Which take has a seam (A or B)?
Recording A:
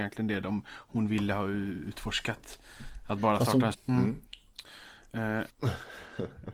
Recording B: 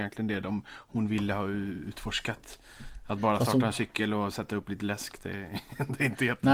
A